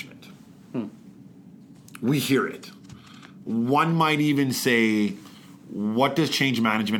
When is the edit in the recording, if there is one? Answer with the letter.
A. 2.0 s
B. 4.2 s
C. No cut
C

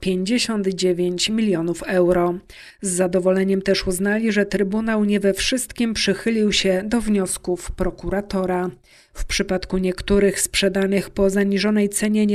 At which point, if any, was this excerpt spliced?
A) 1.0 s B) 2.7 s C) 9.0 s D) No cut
B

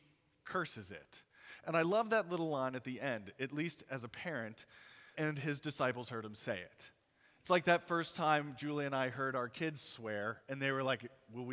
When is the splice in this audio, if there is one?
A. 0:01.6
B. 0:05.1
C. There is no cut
B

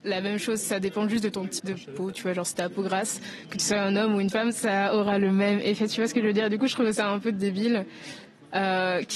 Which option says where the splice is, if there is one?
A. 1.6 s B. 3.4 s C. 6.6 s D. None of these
A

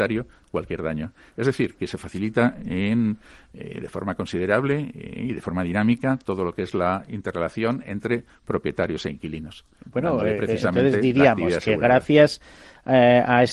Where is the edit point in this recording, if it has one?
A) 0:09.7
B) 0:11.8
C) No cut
C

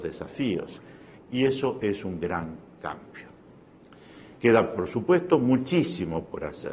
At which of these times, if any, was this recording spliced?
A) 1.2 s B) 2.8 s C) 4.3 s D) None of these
A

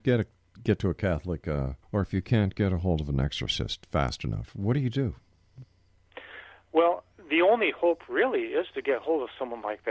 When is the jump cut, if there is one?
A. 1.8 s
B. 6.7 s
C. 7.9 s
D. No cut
A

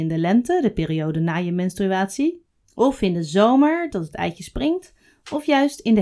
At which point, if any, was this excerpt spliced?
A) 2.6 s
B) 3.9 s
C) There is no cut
B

